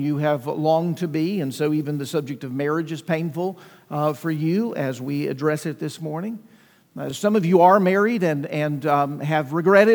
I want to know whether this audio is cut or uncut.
uncut